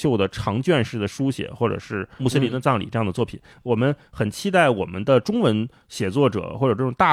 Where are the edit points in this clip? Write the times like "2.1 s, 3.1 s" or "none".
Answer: 3.5 s